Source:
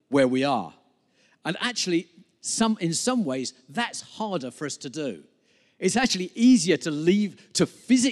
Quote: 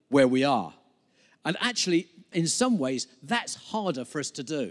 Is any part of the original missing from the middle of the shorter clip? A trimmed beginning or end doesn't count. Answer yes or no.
yes